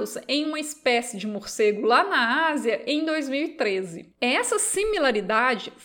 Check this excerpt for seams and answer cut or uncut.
uncut